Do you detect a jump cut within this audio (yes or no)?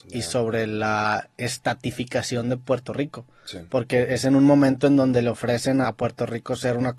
yes